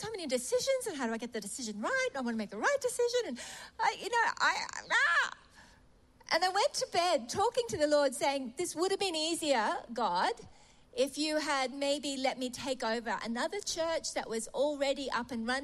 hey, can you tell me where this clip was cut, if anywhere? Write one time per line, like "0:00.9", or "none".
none